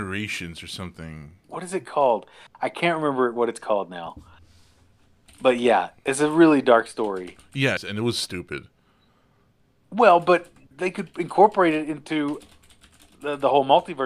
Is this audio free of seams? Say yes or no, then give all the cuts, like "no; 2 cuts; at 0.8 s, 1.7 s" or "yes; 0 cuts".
no; 1 cut; at 7.8 s